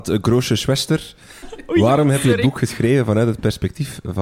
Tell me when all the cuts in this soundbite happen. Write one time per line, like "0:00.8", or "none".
0:01.4